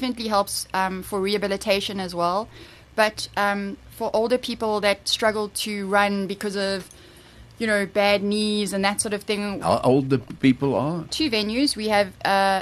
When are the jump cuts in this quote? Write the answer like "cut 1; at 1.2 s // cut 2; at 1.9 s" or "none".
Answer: cut 1; at 9.6 s // cut 2; at 11.1 s